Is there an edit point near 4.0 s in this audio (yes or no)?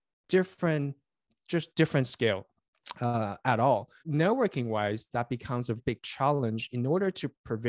yes